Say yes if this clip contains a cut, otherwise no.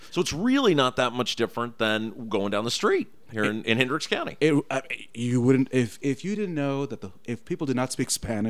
no